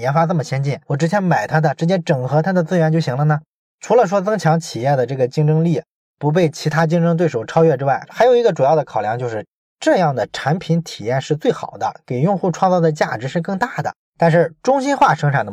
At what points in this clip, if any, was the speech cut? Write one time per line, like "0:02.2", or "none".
0:14.0